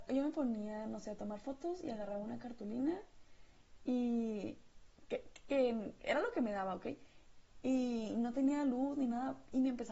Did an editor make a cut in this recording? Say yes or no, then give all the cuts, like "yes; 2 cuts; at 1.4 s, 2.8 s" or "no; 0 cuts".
no; 0 cuts